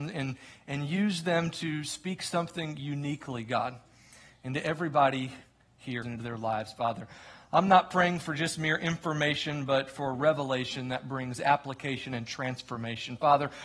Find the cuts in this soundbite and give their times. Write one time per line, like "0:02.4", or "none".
0:06.0